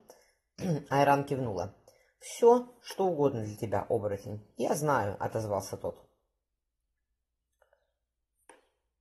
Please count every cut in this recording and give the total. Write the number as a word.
zero